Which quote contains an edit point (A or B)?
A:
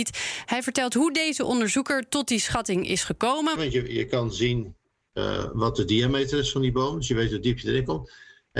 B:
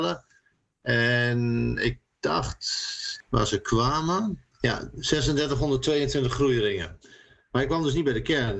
A